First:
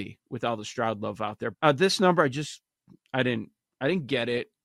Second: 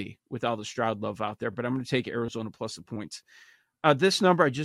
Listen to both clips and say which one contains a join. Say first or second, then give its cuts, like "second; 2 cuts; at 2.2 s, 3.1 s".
first; 1 cut; at 1.5 s